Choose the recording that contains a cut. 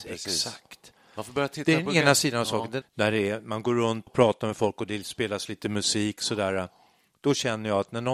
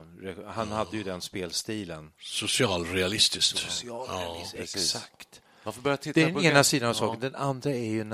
first; 2 cuts; at 2.8 s, 4.1 s

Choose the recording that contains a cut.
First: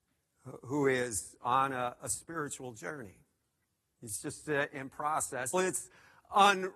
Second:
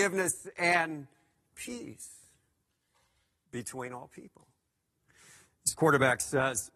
first; 1 cut; at 5.5 s

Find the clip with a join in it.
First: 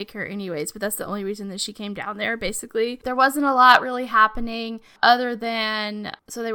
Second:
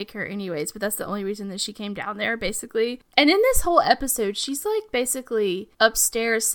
first; 1 cut; at 3.0 s

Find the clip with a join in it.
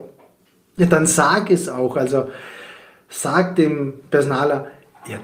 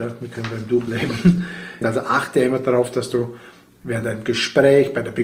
second; 1 cut; at 1.8 s

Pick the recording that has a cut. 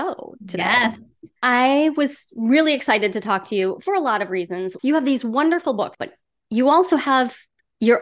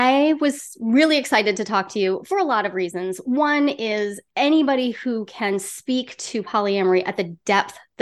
first; 3 cuts; at 1.4 s, 4.8 s, 5.9 s

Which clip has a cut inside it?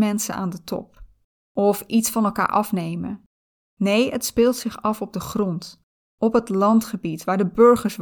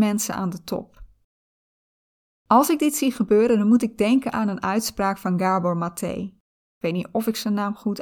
first; 1 cut; at 1.4 s

